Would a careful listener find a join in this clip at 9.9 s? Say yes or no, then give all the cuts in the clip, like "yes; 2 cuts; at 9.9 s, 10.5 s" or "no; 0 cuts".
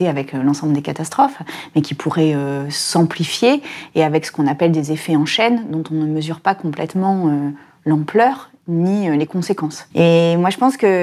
yes; 1 cut; at 9.9 s